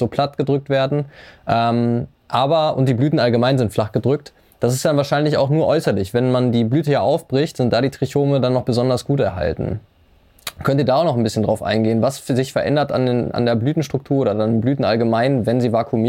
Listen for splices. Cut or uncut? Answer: uncut